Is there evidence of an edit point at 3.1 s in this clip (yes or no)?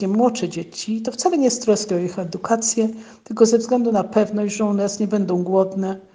no